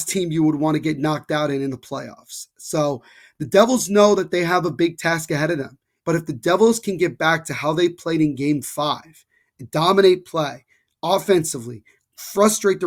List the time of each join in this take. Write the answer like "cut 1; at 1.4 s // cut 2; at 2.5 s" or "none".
cut 1; at 6.0 s